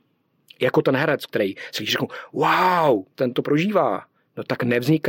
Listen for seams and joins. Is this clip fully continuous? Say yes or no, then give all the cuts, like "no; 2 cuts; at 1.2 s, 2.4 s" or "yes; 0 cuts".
no; 1 cut; at 3.1 s